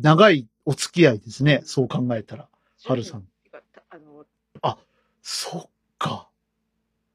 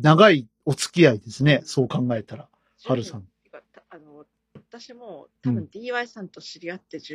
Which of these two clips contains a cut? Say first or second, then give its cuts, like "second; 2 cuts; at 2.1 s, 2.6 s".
first; 1 cut; at 4.6 s